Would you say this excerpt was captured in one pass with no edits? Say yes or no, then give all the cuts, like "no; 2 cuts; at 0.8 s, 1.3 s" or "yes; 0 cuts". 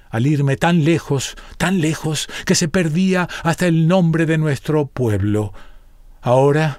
yes; 0 cuts